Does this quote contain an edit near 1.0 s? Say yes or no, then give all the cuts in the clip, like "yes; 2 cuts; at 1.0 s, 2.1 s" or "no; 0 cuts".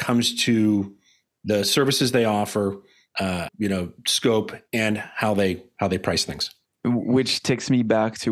no; 1 cut; at 3.5 s